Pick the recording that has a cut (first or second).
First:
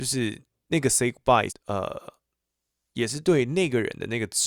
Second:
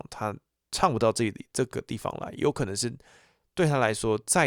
first